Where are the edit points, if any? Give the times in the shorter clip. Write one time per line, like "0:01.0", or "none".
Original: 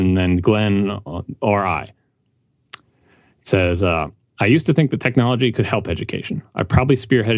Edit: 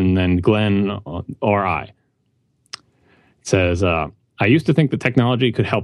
none